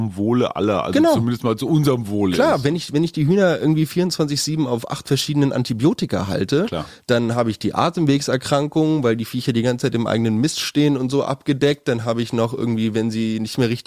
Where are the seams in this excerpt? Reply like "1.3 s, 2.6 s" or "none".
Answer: none